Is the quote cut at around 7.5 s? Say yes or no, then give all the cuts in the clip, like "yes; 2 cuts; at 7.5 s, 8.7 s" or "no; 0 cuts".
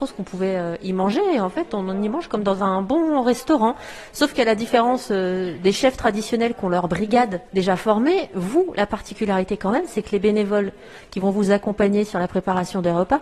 yes; 1 cut; at 7.5 s